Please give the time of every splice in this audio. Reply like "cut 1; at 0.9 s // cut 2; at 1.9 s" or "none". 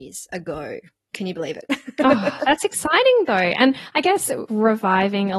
cut 1; at 4.5 s